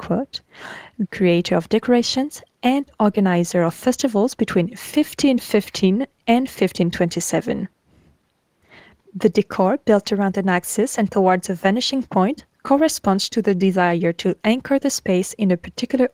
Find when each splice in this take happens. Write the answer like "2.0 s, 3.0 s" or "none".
1.1 s